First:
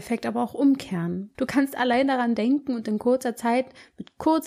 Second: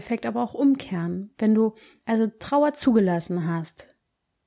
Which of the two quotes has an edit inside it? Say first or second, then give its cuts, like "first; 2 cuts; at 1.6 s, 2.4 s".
first; 1 cut; at 1.3 s